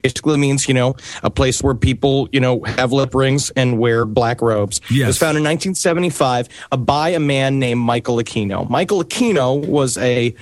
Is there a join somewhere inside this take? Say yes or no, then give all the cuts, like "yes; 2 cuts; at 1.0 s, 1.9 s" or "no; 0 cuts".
no; 0 cuts